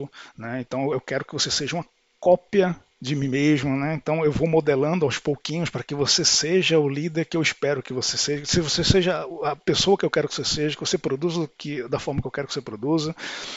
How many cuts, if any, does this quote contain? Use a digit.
0